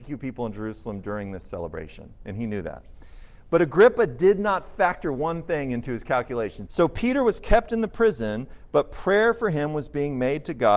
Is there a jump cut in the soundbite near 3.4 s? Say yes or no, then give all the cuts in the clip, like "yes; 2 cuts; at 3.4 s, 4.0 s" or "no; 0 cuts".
no; 1 cut; at 6.7 s